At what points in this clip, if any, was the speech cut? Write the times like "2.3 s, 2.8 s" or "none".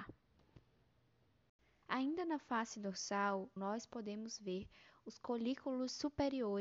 1.8 s, 3.6 s